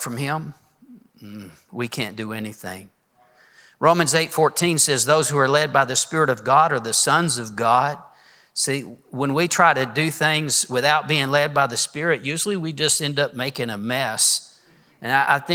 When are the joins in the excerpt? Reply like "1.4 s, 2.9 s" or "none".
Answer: none

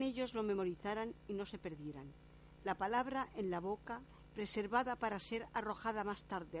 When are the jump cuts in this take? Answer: 2.5 s, 4.2 s

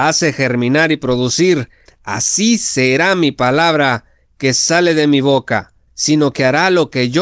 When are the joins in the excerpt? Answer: 1.9 s, 5.9 s

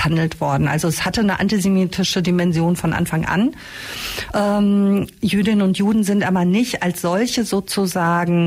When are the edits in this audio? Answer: none

